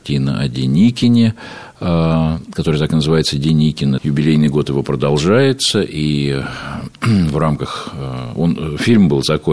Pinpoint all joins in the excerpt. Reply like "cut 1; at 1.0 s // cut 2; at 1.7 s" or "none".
cut 1; at 4.0 s